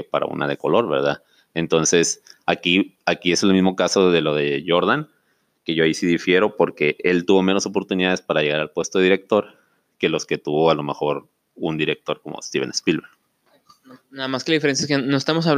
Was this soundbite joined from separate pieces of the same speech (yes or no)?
no